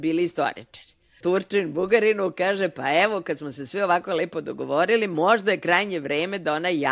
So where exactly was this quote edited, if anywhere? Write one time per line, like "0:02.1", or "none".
0:01.2